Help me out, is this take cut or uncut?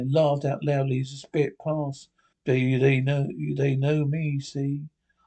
cut